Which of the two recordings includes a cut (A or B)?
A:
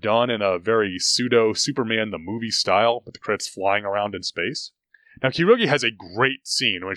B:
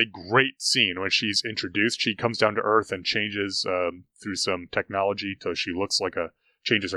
A